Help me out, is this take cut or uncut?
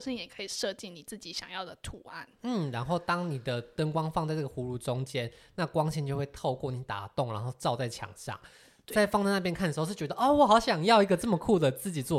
uncut